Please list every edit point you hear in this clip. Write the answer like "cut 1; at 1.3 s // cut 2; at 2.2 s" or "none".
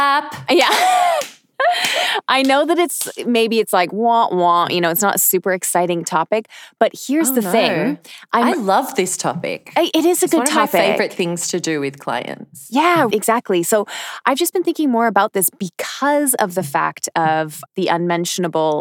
cut 1; at 13.1 s // cut 2; at 17.7 s